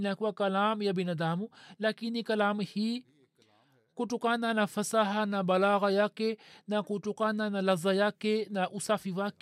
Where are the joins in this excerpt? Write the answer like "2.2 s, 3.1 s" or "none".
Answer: none